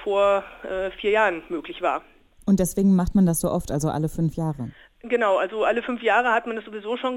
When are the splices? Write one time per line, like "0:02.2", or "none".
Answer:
none